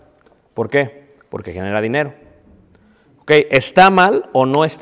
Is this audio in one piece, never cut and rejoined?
yes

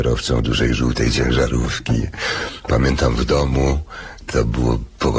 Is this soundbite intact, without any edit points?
yes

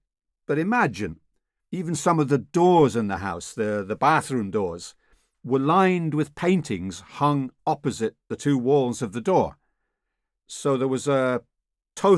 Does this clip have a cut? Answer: yes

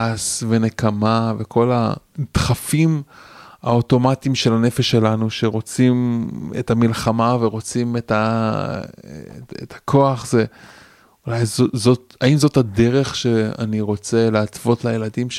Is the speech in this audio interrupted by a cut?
no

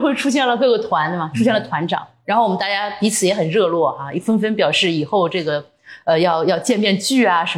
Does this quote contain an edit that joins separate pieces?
no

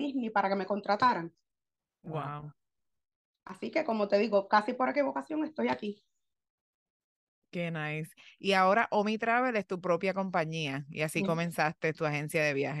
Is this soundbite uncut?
yes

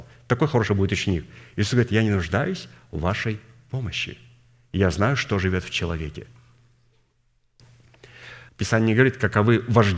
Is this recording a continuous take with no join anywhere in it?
no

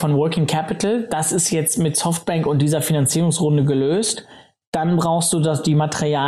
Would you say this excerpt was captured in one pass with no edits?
yes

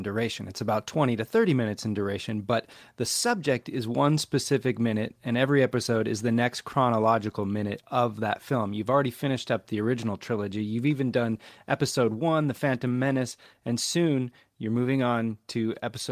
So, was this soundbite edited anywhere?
no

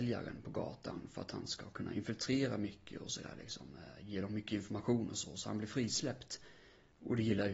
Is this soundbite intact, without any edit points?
yes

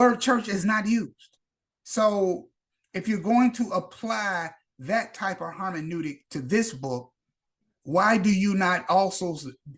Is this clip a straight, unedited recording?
yes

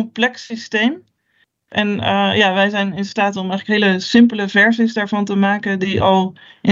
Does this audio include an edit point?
no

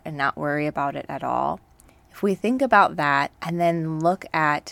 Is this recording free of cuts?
no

